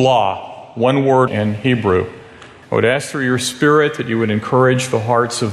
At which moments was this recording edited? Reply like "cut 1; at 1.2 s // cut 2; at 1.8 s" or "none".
cut 1; at 1.3 s // cut 2; at 2.6 s